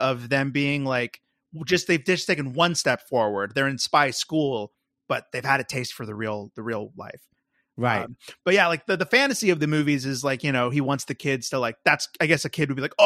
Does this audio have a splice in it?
no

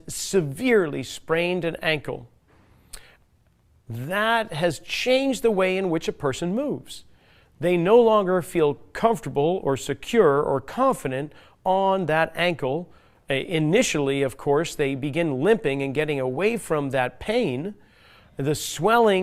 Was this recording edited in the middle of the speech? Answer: no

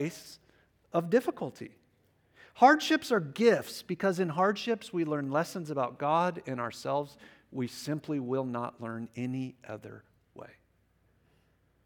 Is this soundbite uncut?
yes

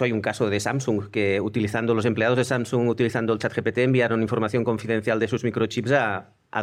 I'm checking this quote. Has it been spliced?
no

